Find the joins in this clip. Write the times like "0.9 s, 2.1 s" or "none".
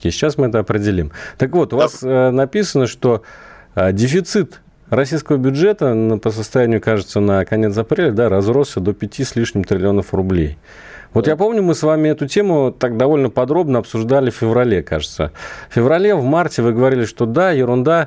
none

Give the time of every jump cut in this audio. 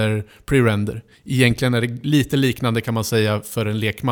none

